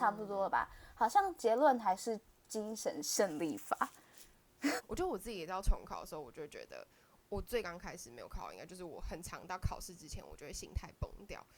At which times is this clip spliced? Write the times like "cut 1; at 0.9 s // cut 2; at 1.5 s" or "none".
cut 1; at 4.8 s